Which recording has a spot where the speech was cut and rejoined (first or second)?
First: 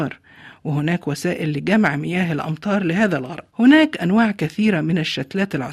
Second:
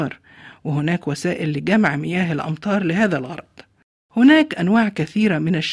first